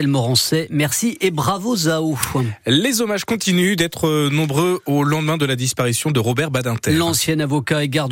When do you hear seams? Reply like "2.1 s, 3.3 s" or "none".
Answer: none